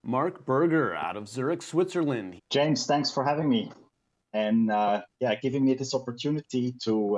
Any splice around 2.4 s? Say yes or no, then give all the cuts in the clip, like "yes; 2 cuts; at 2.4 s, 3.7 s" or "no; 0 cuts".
yes; 1 cut; at 2.4 s